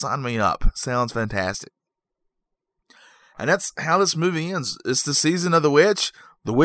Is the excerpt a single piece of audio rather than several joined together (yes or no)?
yes